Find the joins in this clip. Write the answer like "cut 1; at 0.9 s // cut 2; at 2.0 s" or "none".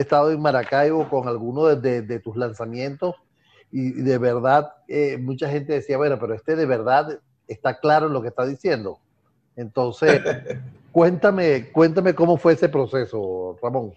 none